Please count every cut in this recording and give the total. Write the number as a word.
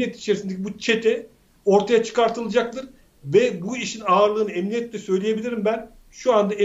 zero